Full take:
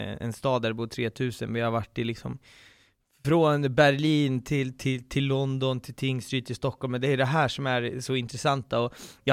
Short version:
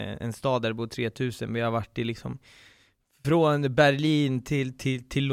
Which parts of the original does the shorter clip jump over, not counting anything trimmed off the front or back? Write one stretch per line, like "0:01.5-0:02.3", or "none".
none